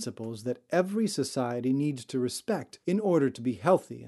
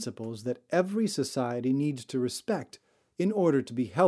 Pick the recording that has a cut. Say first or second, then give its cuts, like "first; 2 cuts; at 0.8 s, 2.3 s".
first; 1 cut; at 2.8 s